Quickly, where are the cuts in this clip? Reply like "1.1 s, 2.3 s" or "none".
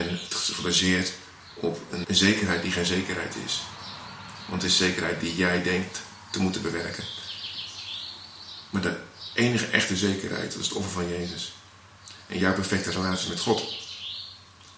2.0 s